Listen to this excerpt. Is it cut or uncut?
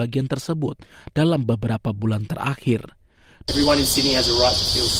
cut